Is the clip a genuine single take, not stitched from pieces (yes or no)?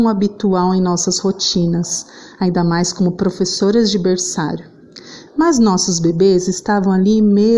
no